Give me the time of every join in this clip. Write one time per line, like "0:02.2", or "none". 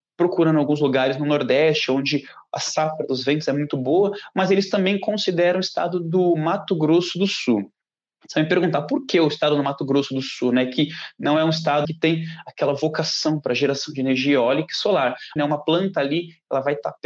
0:11.8
0:15.4